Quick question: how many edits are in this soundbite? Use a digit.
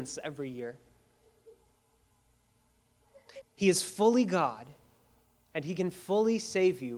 1